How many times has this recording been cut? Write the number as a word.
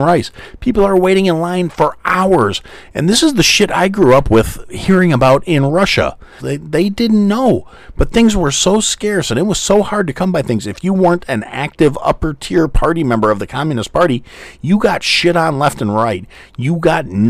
one